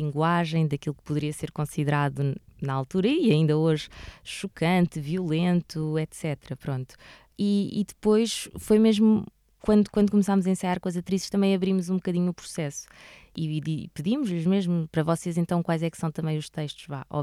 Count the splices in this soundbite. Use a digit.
0